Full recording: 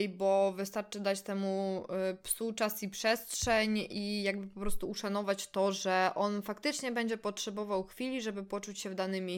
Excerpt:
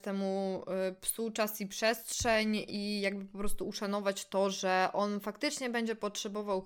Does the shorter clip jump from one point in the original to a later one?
no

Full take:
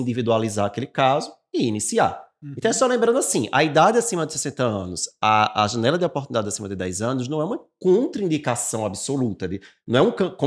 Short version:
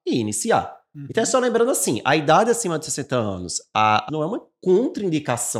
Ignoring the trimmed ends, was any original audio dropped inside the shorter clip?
yes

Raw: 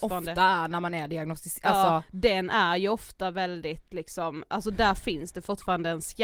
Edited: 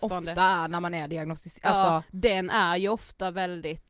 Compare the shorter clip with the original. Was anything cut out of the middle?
no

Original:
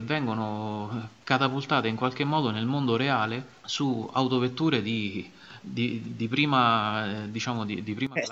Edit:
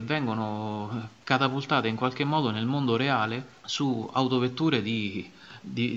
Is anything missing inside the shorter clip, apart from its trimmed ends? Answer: no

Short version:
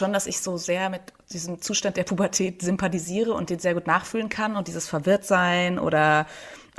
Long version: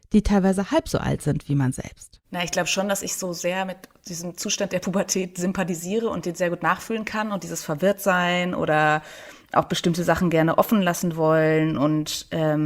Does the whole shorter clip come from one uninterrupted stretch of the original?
yes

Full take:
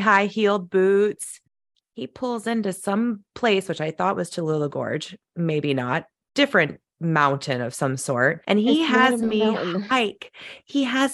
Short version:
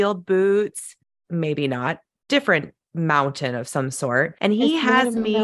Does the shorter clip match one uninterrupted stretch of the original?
no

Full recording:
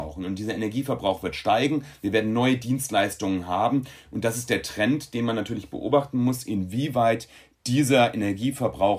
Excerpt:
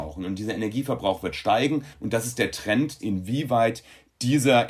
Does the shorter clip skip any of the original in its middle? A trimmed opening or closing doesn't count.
yes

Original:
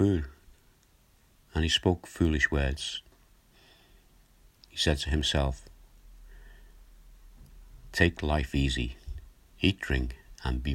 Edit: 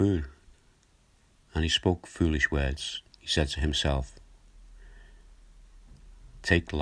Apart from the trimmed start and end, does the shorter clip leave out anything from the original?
yes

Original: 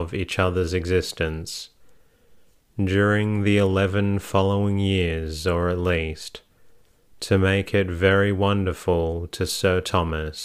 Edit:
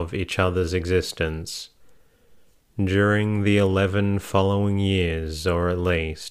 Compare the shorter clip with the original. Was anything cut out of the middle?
no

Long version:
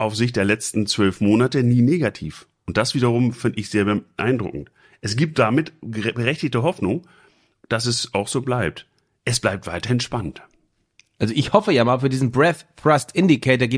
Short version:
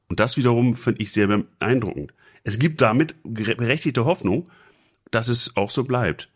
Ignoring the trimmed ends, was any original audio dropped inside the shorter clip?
no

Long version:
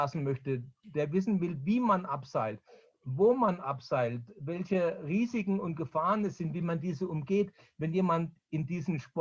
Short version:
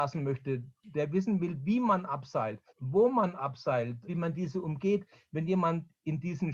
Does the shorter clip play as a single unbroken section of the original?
no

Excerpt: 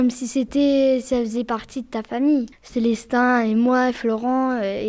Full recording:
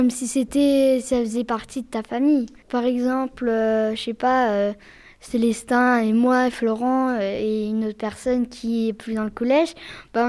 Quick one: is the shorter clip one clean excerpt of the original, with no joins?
no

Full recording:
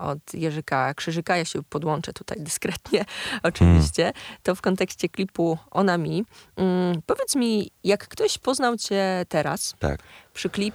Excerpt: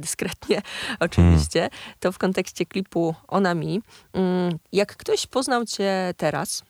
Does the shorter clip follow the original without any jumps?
no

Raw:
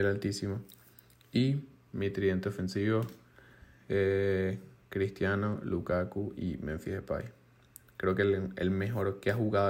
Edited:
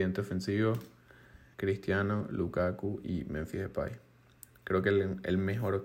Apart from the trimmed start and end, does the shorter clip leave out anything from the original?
yes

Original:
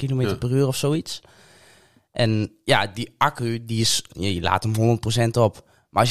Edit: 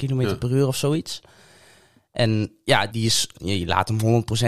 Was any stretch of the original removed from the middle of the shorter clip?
yes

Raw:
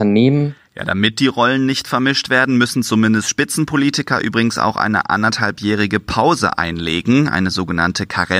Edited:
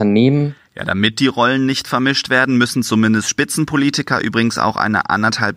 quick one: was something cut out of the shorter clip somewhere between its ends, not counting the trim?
no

